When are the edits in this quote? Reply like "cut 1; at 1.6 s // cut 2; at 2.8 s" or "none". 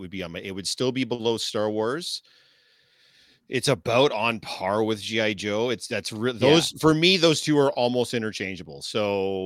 none